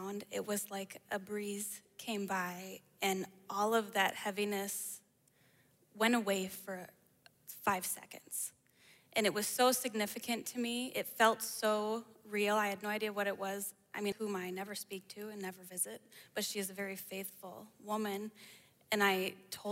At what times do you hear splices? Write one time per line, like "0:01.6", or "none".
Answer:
0:14.1